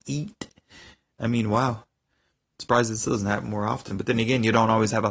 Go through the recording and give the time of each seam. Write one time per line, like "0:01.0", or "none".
none